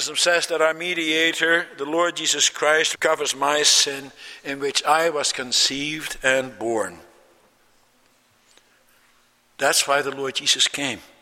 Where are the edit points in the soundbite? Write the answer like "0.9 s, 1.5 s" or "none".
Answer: 2.9 s